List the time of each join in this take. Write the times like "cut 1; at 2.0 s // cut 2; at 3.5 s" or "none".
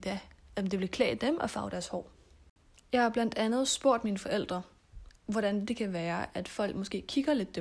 none